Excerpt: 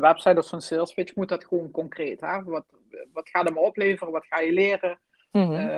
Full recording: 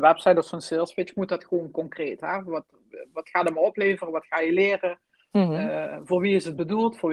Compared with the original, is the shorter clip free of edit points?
yes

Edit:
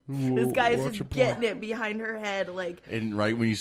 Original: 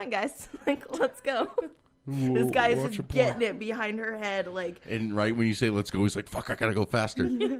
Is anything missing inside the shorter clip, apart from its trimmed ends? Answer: no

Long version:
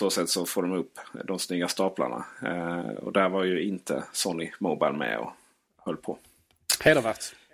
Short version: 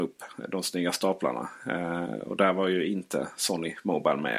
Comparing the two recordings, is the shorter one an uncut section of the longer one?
yes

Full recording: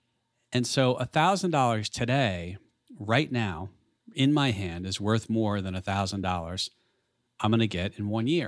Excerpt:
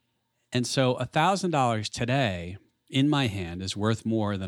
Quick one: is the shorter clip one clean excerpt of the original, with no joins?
no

